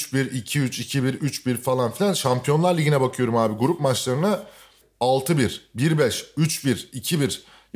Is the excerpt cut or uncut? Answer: cut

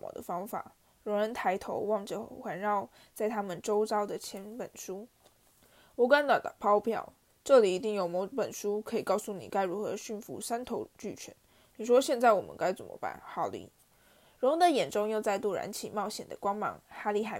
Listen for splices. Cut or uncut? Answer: uncut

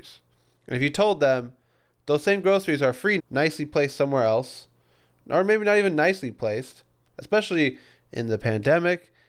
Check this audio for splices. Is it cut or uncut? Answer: cut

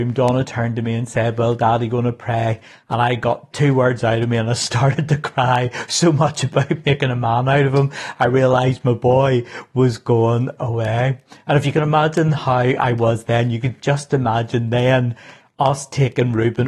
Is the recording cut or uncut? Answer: uncut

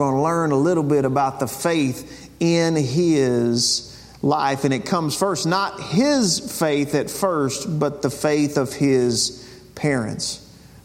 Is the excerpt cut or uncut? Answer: uncut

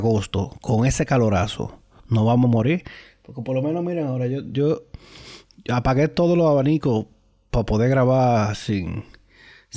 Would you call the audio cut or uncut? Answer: uncut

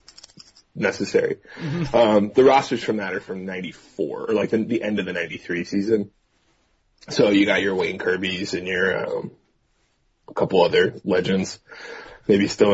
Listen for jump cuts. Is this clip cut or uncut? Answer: uncut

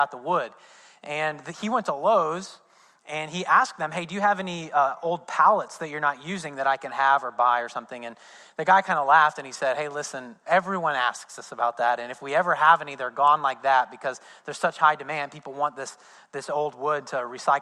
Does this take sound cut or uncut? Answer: cut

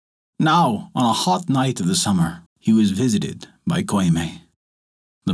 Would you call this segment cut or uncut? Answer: cut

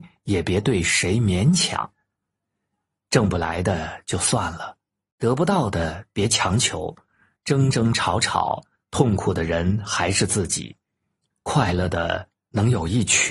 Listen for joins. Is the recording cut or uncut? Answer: cut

